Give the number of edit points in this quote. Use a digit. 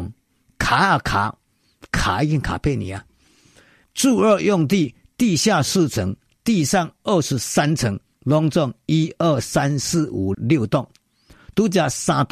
2